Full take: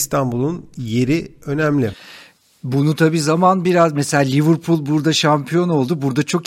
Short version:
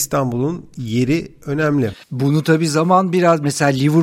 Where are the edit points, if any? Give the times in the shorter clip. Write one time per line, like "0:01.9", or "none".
0:02.0